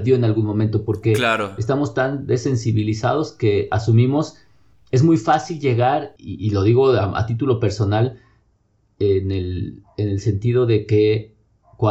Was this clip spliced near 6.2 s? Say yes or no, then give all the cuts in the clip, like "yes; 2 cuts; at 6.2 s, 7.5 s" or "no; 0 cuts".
yes; 1 cut; at 6.2 s